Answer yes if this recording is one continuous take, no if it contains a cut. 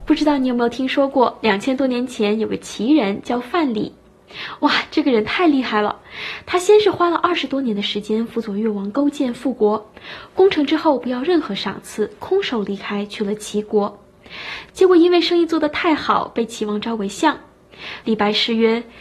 no